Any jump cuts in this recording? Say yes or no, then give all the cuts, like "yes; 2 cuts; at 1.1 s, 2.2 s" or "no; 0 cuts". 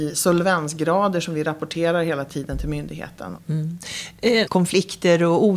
yes; 2 cuts; at 3.4 s, 4.5 s